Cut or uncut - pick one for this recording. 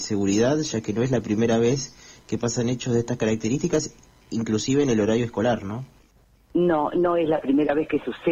uncut